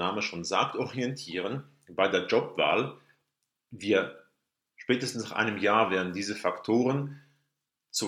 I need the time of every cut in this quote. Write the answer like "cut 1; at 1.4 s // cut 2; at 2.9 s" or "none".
none